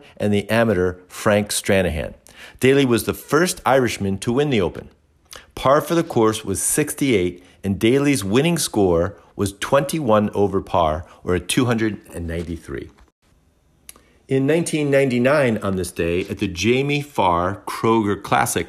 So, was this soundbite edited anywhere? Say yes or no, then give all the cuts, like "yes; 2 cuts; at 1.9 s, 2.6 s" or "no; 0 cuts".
no; 0 cuts